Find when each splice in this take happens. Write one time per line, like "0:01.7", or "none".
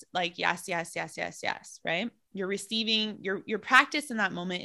none